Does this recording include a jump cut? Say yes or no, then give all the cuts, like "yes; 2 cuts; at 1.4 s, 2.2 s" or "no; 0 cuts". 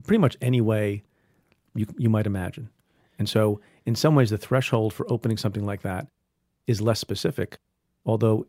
no; 0 cuts